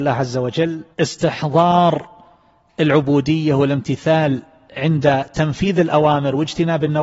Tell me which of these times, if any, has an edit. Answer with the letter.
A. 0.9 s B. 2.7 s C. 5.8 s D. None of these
A